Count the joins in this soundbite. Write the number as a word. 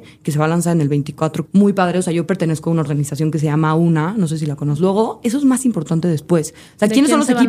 two